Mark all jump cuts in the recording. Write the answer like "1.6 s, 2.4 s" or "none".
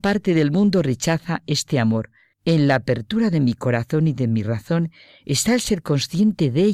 2.3 s